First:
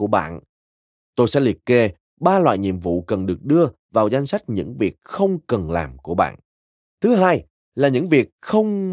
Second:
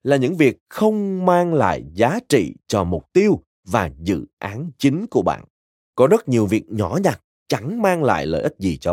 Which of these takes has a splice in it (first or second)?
first